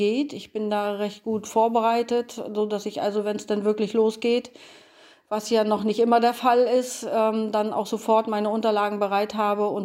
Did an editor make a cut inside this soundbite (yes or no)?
no